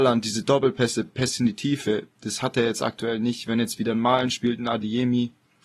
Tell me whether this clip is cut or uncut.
uncut